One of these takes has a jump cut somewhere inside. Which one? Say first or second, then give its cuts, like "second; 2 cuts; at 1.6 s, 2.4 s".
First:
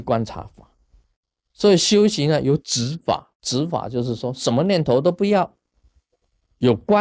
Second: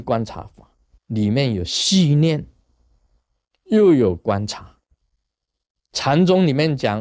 second; 1 cut; at 1.0 s